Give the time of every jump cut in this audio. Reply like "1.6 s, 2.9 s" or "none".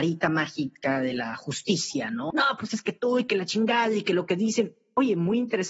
2.3 s